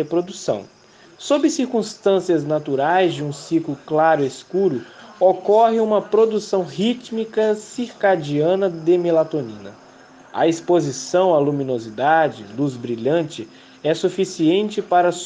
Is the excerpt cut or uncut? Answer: cut